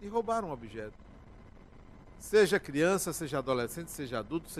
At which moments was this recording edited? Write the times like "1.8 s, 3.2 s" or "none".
2.1 s